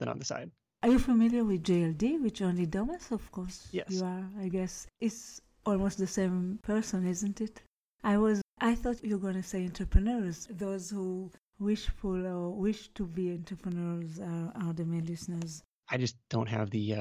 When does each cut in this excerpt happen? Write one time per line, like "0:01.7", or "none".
0:08.4
0:10.5
0:15.7